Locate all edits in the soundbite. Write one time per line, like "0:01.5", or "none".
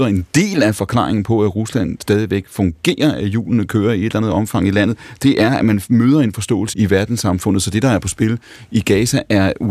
0:06.7